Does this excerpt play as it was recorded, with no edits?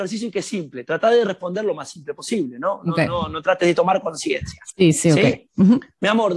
yes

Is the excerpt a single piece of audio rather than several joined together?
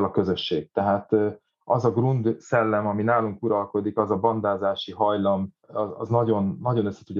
no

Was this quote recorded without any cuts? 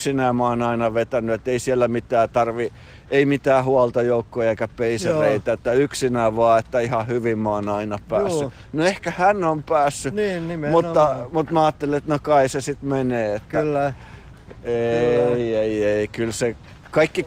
yes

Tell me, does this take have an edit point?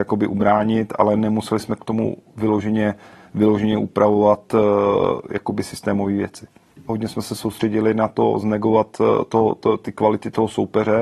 yes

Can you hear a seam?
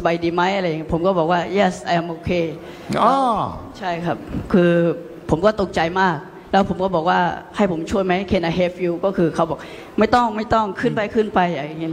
no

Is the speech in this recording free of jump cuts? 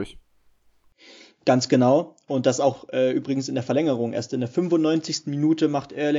yes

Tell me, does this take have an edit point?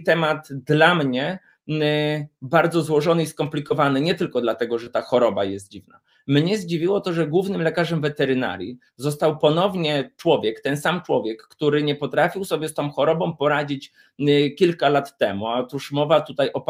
no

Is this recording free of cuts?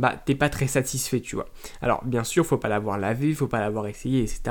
yes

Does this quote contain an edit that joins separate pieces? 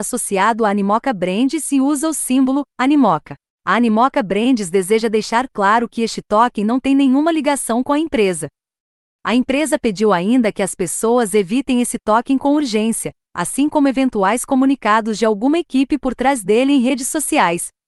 no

